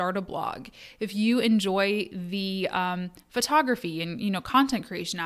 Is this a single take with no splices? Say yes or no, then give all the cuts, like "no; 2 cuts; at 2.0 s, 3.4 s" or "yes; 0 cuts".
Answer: yes; 0 cuts